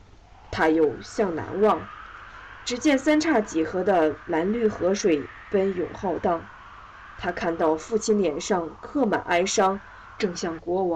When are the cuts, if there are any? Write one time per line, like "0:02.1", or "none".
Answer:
none

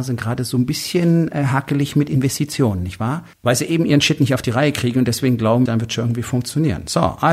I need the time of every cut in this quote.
0:03.3
0:05.7

